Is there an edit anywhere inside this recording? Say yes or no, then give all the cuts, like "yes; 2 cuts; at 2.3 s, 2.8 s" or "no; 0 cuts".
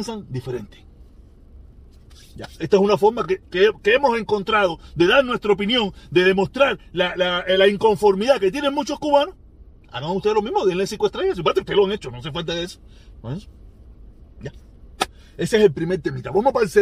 no; 0 cuts